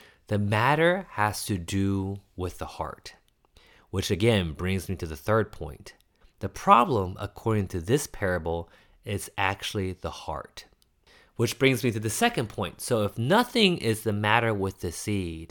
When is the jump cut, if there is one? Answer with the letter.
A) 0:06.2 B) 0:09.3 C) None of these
A